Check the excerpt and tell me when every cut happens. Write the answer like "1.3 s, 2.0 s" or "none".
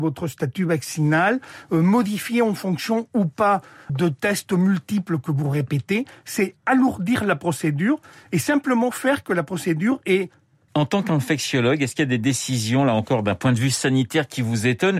3.9 s, 10.7 s